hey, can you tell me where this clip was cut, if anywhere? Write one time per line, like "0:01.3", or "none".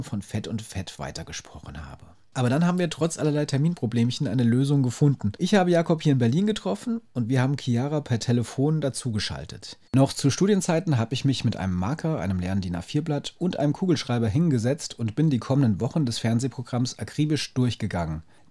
0:02.2
0:09.9